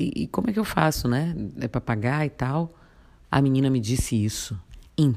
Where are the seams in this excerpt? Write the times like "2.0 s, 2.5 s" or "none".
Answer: 3.2 s